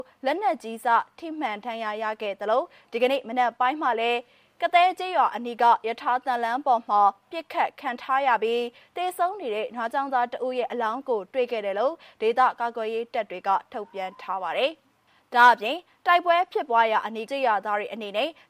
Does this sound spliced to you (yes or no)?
yes